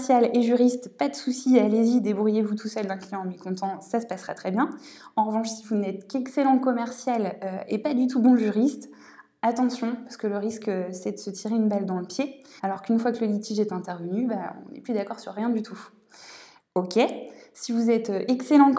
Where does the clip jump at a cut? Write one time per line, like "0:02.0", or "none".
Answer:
0:12.6
0:16.6